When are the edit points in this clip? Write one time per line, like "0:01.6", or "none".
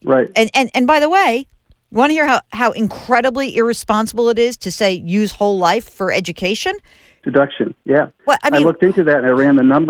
0:07.2

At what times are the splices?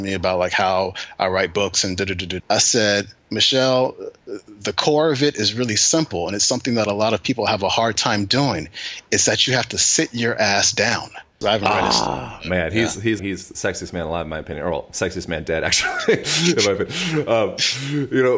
0:02.4
0:11.4
0:13.2

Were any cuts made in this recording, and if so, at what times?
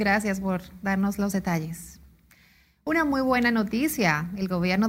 none

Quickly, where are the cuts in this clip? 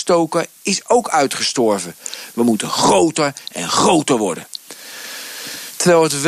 0:02.3

